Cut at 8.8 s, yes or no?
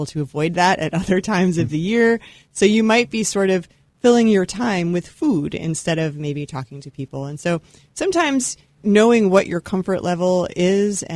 yes